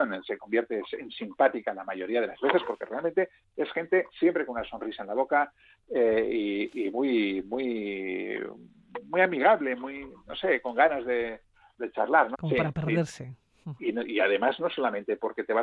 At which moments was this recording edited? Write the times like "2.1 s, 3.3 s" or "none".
12.3 s, 13.8 s